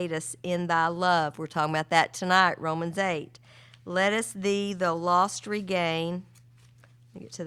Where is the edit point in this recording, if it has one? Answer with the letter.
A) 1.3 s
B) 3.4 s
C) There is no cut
C